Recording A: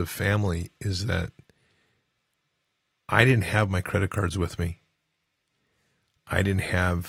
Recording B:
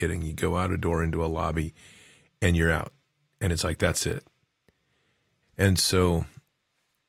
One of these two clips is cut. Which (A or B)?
B